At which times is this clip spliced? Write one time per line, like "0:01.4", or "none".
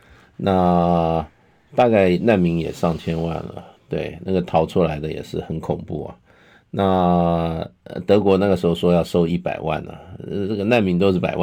none